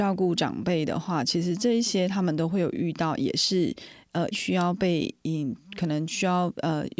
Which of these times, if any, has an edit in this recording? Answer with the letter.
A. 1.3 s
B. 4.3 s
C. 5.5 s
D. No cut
B